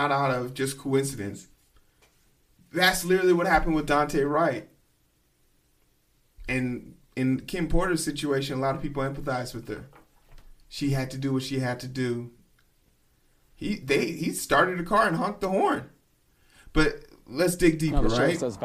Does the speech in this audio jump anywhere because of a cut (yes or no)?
no